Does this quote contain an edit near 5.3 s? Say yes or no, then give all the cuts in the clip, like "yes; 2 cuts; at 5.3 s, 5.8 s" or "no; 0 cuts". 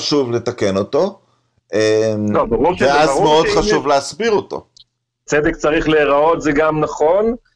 yes; 1 cut; at 5.3 s